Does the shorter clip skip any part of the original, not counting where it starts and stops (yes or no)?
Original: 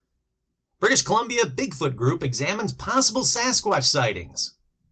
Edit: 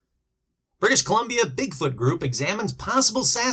no